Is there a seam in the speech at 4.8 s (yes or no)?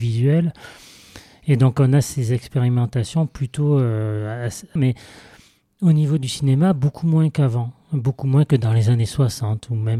yes